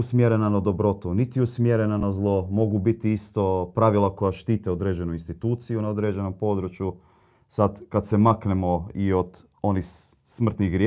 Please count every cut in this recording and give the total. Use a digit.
0